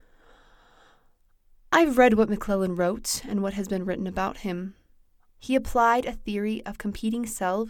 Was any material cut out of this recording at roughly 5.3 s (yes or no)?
yes